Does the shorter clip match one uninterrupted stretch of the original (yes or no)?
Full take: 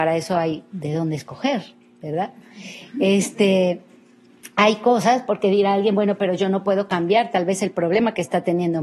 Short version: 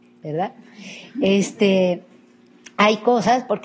yes